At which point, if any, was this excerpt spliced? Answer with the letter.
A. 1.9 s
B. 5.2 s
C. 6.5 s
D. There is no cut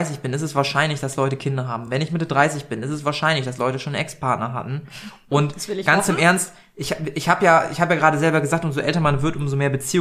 D